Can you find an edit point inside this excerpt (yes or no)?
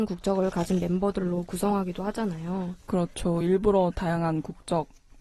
no